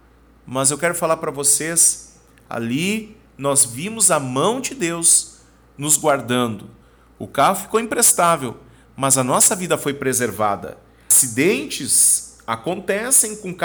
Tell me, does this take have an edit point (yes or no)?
no